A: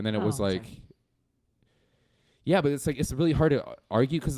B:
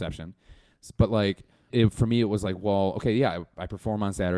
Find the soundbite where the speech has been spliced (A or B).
B